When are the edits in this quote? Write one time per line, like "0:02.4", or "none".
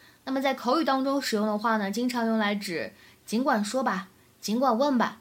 none